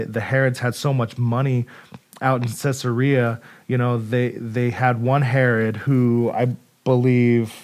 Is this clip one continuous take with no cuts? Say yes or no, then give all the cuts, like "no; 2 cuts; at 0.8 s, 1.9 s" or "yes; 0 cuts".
yes; 0 cuts